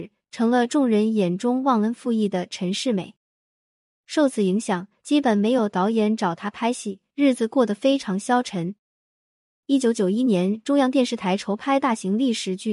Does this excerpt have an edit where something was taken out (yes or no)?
no